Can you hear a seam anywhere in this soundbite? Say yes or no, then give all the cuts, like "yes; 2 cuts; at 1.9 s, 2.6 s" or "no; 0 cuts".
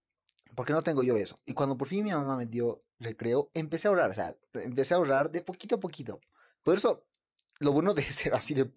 no; 0 cuts